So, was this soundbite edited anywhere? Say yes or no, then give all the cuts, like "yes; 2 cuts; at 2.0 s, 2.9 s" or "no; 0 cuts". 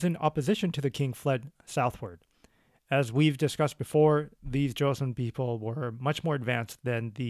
no; 0 cuts